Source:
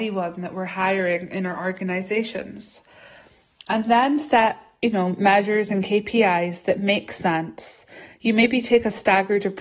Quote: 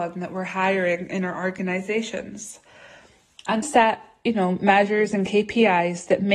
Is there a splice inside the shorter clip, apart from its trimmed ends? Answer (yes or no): yes